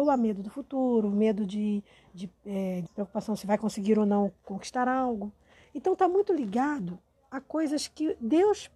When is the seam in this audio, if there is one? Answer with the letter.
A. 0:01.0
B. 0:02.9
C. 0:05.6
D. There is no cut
B